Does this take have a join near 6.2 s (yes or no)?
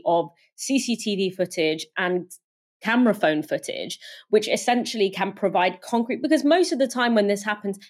no